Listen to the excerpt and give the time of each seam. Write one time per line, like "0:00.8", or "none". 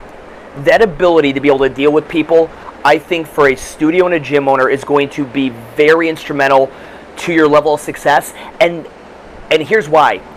none